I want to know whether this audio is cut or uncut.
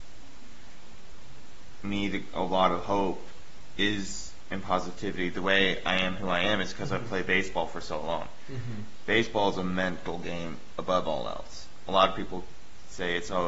uncut